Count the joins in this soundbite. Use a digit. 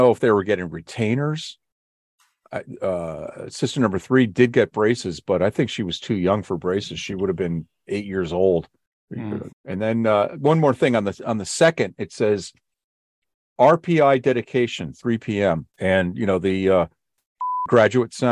2